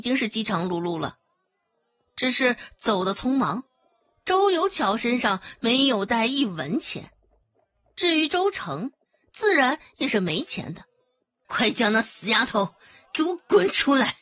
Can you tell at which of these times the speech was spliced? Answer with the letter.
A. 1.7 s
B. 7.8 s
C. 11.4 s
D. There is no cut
C